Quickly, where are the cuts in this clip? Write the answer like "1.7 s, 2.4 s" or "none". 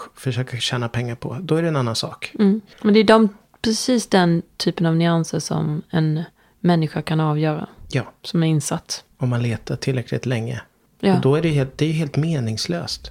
9.1 s